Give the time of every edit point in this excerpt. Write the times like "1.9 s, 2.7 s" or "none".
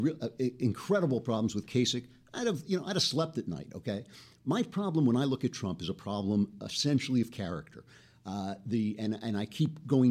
none